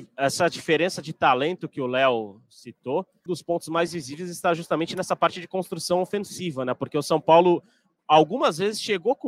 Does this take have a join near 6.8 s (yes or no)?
no